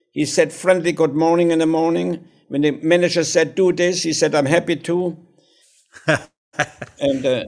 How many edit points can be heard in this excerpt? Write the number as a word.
one